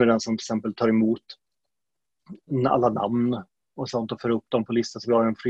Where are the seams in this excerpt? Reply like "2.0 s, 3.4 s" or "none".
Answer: none